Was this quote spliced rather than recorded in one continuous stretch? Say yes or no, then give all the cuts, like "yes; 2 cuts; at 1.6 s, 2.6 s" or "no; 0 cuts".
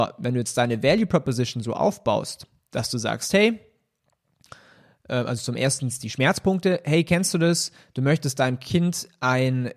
no; 0 cuts